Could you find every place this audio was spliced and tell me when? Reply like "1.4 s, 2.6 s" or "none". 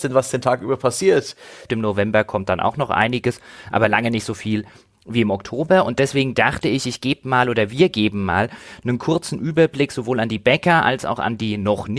1.7 s